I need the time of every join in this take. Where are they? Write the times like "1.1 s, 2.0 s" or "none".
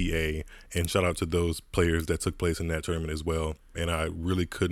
3.7 s